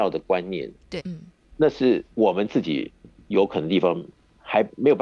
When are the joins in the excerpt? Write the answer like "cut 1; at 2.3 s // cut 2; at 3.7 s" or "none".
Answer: cut 1; at 1.0 s // cut 2; at 2.1 s